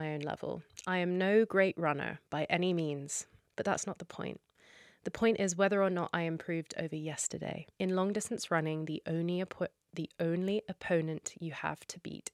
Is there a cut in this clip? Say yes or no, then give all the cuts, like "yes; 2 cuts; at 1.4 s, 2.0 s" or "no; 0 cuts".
yes; 2 cuts; at 3.5 s, 7.7 s